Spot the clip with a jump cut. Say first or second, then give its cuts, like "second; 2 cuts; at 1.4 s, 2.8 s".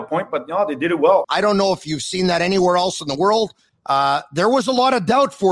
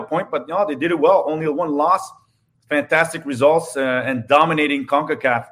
first; 2 cuts; at 1.2 s, 3.7 s